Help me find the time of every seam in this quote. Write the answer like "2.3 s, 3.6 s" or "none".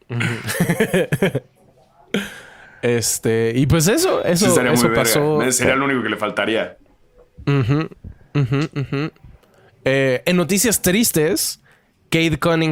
none